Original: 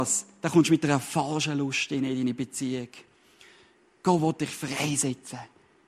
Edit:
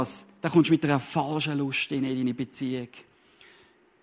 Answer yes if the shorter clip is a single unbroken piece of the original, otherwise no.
yes